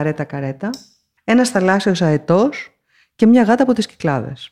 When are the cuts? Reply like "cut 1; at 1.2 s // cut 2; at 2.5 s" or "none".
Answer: cut 1; at 1.2 s